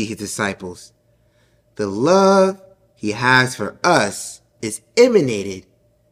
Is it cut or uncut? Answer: uncut